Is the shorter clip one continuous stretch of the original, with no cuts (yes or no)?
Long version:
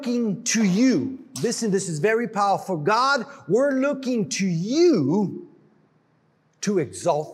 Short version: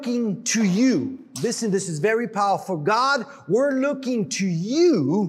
yes